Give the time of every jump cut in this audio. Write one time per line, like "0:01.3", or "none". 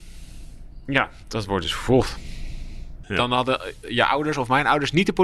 0:03.0

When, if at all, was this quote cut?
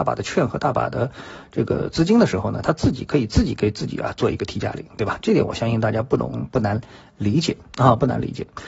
none

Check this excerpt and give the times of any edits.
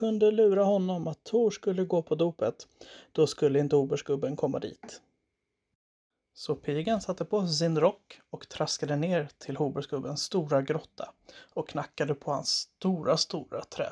none

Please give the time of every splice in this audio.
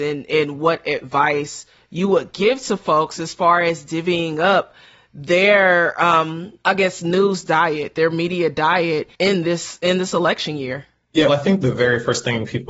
0:09.1
0:11.3

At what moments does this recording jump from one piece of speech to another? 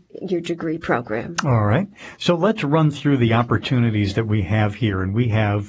none

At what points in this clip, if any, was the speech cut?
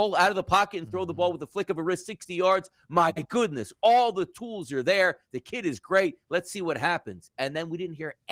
none

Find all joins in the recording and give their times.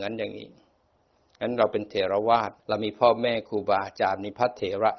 0:02.6

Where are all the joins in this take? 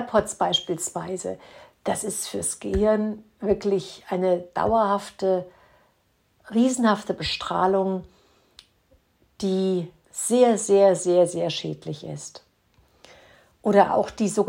none

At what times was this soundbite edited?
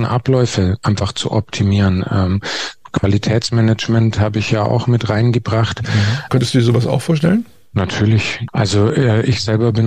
0:06.3

